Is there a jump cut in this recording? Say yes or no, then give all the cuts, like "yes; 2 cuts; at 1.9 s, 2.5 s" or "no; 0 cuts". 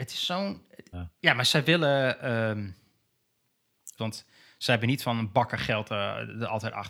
yes; 2 cuts; at 0.9 s, 4.0 s